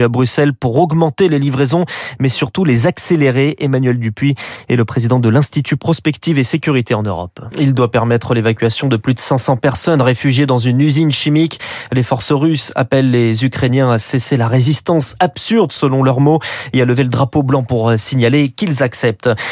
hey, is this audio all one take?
no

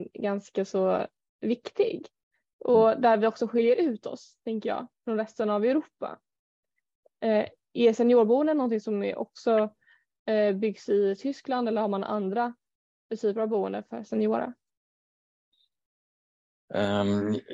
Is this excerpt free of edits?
yes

